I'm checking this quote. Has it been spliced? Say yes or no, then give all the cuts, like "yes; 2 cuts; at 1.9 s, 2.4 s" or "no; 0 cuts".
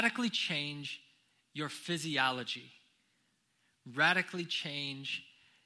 no; 0 cuts